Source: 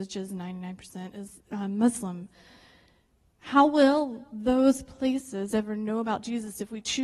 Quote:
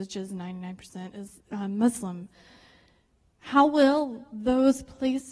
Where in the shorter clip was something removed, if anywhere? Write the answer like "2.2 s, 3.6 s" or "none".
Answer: none